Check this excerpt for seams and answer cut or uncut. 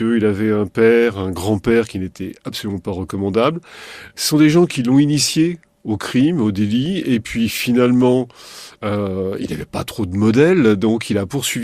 uncut